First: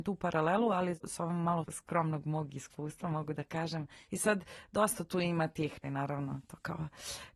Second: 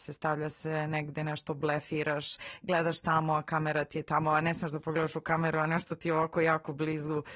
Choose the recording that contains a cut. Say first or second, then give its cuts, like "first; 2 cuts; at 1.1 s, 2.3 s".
first; 2 cuts; at 4.0 s, 5.8 s